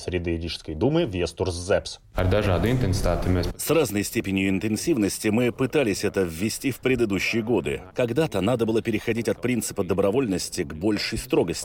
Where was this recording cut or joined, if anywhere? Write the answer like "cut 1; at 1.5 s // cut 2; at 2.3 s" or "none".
cut 1; at 7.9 s